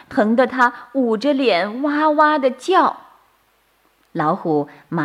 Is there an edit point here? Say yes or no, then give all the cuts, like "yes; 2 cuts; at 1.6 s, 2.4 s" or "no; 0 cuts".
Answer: no; 0 cuts